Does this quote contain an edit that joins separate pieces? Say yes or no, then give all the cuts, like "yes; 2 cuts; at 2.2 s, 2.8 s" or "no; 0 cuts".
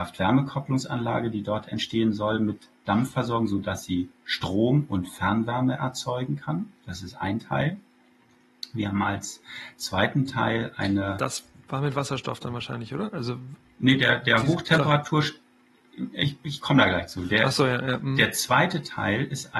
no; 0 cuts